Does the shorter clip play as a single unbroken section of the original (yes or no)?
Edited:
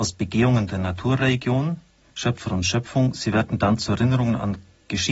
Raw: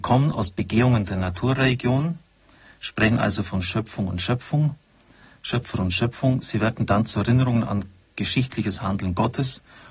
no